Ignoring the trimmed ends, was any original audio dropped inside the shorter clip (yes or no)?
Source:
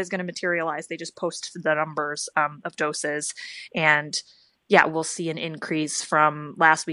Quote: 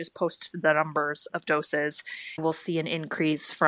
yes